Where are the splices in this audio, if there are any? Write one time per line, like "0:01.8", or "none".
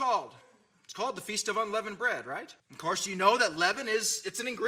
0:02.6